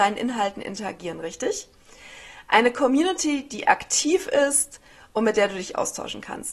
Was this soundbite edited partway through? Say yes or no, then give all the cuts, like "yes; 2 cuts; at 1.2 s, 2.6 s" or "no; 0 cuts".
no; 0 cuts